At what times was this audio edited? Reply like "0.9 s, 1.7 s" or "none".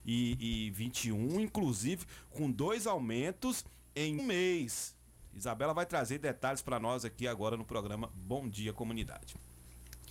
4.2 s